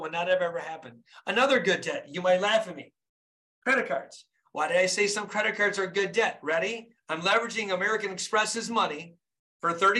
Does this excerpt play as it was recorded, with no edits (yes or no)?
yes